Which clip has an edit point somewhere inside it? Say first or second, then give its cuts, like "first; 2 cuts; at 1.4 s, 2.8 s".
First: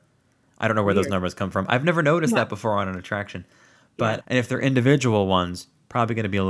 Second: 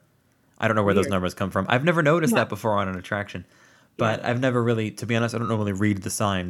first; 1 cut; at 4.2 s